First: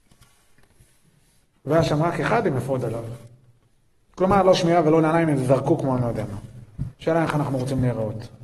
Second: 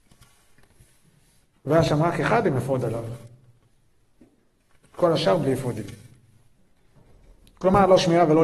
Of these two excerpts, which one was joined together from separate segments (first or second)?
first